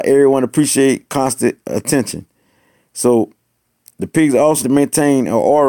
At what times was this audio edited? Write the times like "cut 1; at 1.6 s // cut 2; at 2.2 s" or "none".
cut 1; at 4.6 s